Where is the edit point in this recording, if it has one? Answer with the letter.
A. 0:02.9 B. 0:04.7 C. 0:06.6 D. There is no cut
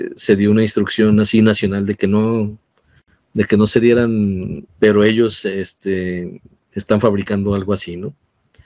B